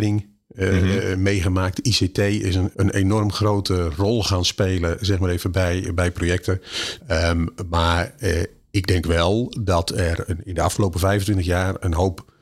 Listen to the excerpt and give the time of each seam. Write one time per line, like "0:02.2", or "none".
0:02.7
0:07.0
0:10.3